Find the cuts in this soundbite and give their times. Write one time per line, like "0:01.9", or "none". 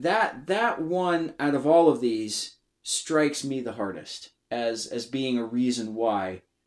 0:04.4